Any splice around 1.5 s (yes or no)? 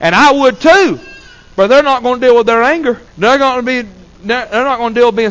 no